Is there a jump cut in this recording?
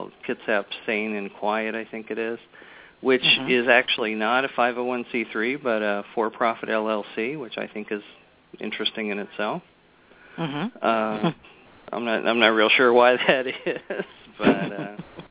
no; 0 cuts

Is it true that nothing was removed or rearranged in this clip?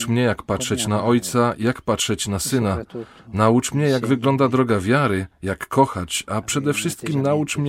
yes; 0 cuts

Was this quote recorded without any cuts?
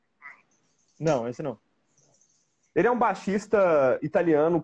yes; 0 cuts

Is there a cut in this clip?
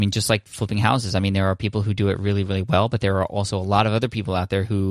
no; 0 cuts

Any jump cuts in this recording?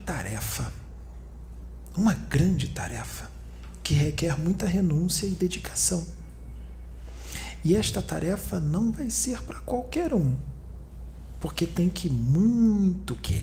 no; 0 cuts

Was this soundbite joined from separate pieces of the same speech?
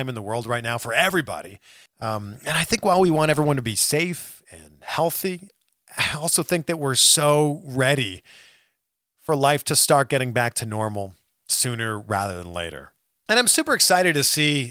yes; 2 cuts; at 1.9 s, 13.3 s

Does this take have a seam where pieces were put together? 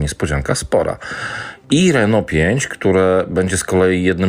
yes; 1 cut; at 1.6 s

